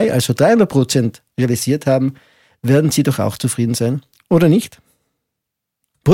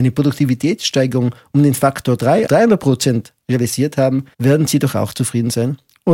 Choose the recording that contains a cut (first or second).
second